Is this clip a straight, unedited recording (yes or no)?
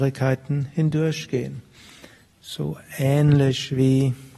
yes